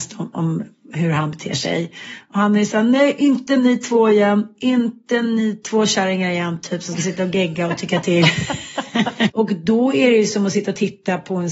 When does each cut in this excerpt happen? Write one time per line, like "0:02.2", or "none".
0:09.3